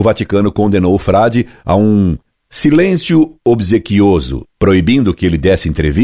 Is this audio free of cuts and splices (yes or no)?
yes